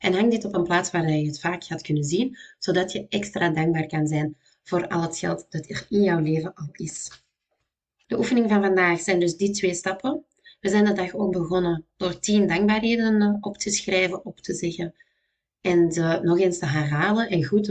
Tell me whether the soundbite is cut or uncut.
uncut